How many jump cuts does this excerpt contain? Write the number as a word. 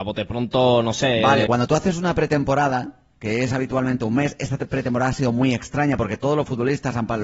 one